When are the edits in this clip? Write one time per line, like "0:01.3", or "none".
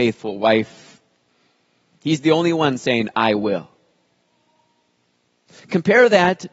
0:02.0